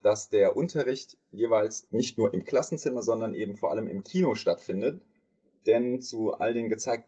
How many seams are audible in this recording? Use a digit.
0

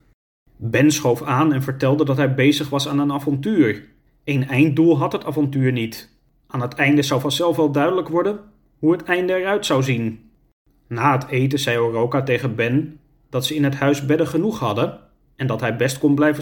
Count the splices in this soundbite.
1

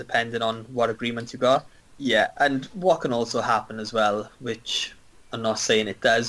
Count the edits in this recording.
1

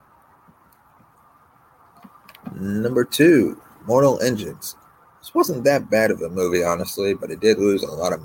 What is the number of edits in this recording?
0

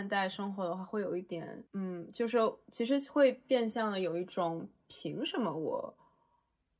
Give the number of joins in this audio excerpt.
1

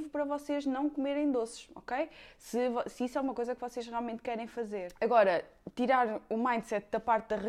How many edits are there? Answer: 0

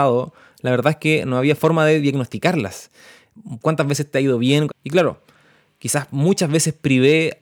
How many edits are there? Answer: 1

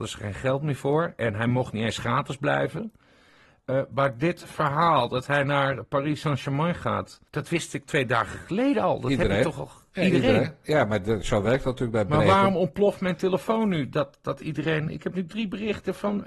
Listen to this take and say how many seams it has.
1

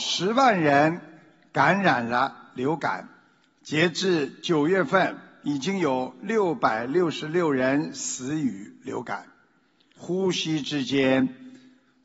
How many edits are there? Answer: 1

